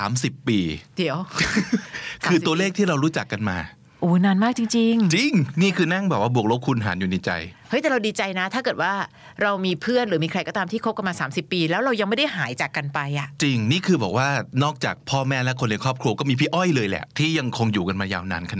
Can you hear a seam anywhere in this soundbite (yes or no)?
no